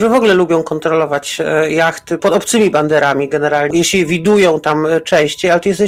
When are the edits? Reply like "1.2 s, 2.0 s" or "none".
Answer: 2.2 s, 3.7 s